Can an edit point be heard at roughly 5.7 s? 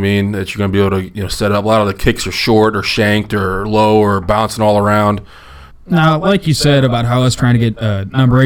yes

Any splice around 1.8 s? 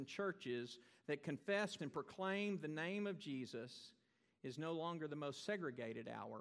yes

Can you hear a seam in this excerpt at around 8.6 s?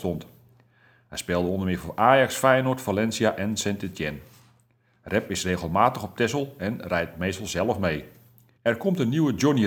yes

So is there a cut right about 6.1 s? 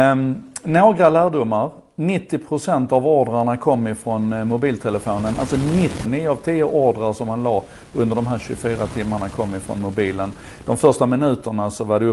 yes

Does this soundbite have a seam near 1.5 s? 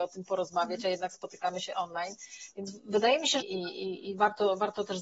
no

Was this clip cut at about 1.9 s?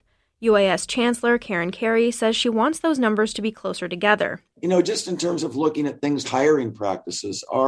no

